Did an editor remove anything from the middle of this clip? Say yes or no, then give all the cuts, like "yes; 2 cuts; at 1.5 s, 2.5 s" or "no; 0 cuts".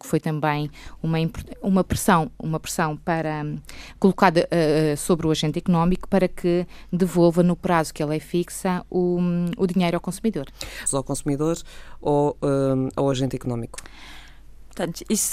yes; 1 cut; at 10.9 s